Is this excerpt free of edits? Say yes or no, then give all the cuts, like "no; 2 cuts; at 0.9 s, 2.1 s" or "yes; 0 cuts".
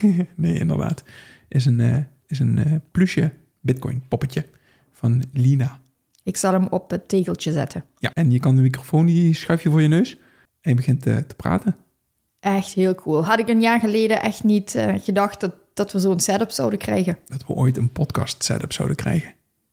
no; 1 cut; at 8.1 s